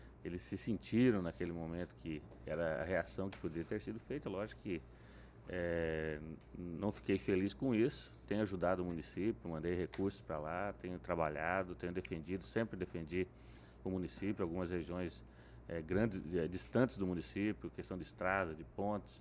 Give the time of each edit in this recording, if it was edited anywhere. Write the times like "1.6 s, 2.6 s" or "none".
none